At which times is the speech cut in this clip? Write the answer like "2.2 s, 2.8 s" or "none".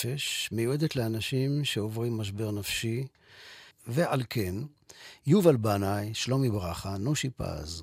3.7 s